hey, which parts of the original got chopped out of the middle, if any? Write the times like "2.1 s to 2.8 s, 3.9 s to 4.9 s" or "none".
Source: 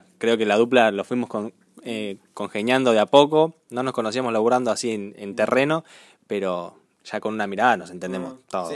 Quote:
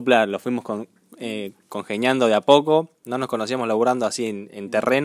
none